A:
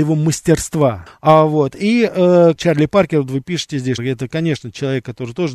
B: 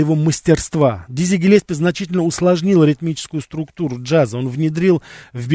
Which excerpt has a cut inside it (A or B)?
A